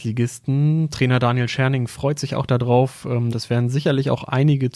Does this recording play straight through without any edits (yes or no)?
no